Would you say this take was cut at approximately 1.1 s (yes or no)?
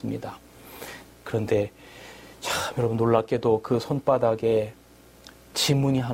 yes